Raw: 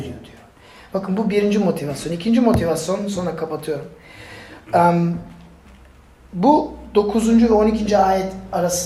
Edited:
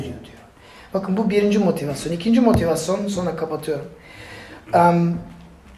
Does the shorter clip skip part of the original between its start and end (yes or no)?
no